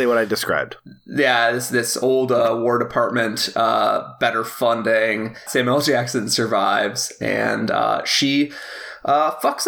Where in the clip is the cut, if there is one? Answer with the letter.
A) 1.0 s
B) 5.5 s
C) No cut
B